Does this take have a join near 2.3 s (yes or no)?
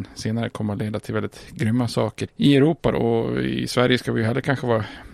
yes